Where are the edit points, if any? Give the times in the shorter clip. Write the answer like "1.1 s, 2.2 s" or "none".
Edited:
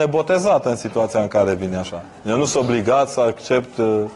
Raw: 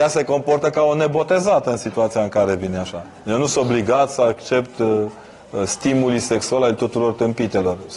none